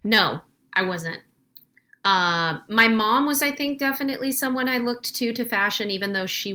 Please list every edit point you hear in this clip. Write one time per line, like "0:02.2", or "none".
none